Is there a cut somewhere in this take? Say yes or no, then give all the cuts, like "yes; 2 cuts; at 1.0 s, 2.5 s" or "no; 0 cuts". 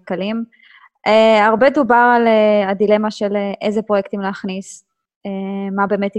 no; 0 cuts